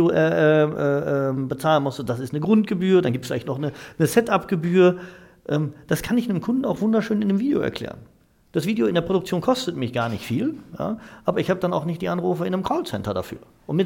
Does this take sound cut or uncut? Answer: uncut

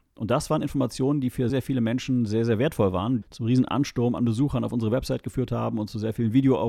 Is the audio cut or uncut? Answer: cut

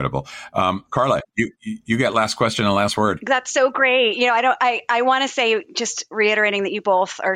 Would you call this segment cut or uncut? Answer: uncut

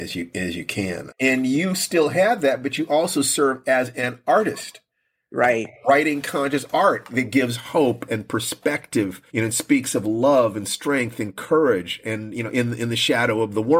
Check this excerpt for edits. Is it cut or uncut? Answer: cut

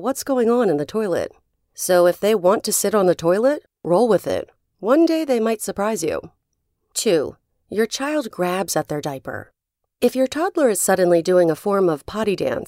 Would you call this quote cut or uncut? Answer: uncut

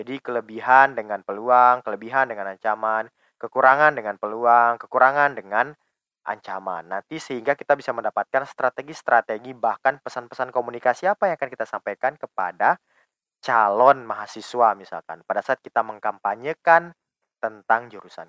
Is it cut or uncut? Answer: uncut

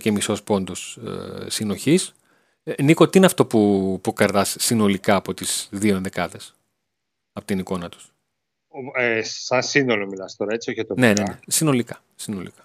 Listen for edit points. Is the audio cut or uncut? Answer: uncut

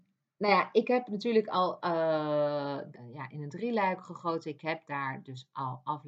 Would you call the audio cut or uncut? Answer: cut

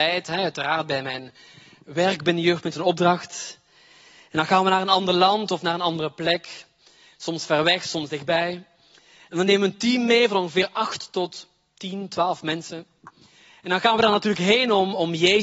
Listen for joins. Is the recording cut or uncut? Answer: uncut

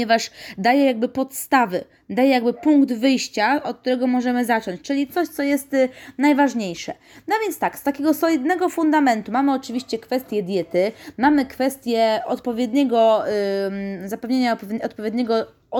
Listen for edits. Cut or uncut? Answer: uncut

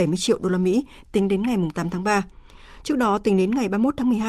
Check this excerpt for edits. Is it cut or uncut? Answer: uncut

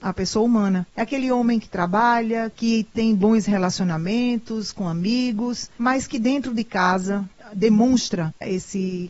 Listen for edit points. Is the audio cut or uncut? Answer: cut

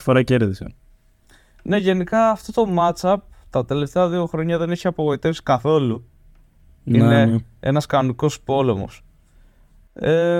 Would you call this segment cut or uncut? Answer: uncut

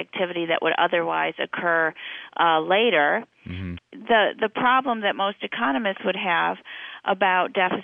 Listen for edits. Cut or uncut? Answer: cut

